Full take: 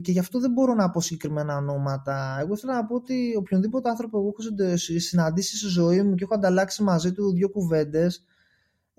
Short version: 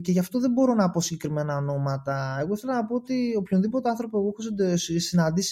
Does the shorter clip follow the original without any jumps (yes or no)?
yes